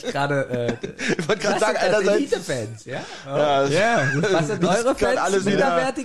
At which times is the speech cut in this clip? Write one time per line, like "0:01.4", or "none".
none